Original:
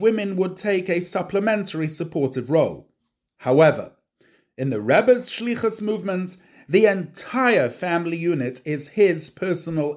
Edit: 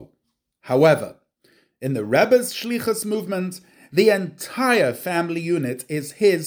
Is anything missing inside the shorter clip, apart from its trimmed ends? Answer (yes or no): no